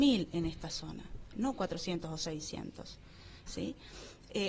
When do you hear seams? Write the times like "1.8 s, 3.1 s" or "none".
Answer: 1.3 s, 3.5 s